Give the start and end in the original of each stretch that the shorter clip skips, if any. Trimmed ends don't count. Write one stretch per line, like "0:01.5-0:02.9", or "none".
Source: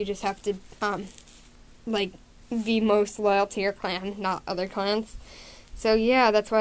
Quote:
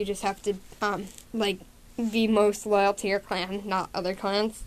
0:01.2-0:01.8